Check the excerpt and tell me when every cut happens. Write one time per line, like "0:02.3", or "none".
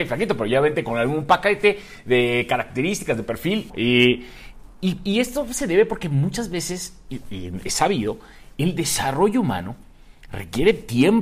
0:03.7